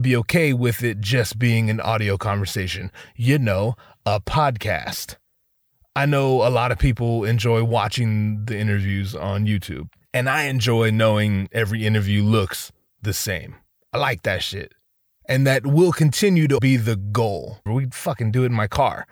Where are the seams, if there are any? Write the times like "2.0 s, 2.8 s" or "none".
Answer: 16.6 s, 17.7 s